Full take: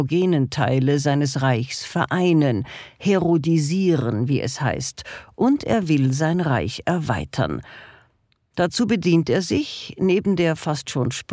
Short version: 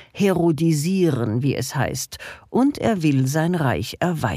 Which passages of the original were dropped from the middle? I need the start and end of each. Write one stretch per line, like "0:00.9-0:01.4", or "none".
none